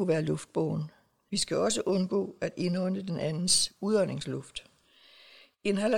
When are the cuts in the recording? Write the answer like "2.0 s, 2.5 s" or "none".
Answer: 1.3 s